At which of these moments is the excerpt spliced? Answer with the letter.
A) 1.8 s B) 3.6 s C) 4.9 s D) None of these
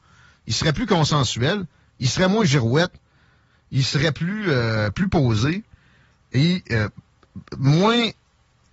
D